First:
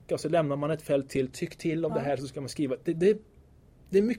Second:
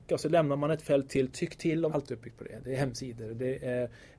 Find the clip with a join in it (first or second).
second